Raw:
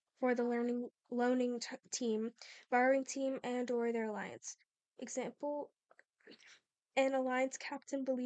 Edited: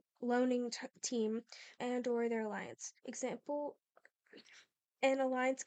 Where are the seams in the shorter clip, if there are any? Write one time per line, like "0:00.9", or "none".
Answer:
0:01.8
0:03.0